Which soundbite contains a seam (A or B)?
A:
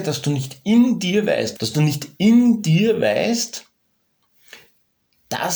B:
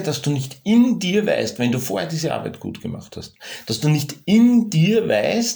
A